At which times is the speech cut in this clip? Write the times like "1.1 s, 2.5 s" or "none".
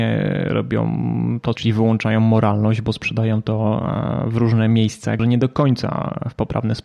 1.6 s, 5.2 s